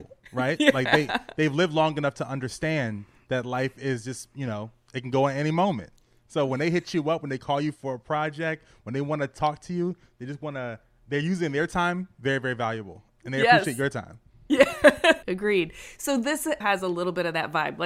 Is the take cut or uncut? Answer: cut